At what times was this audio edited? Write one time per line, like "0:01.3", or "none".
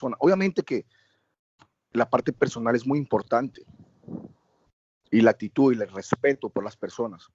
none